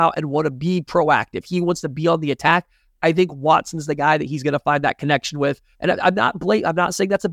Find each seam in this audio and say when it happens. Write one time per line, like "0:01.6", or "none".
0:05.7